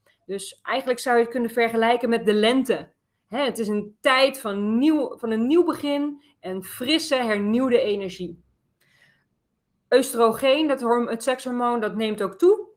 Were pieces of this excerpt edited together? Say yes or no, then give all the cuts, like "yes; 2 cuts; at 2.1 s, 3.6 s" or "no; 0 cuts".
no; 0 cuts